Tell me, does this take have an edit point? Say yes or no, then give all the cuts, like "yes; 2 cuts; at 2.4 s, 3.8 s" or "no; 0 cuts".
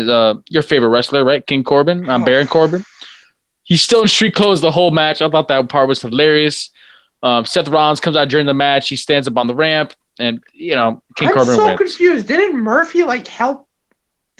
no; 0 cuts